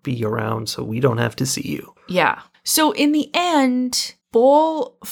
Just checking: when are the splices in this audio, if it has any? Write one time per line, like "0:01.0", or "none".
0:04.2